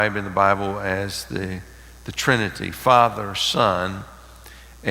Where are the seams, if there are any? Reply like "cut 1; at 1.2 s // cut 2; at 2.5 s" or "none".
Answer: none

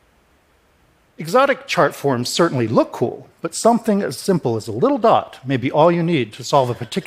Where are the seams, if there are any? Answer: none

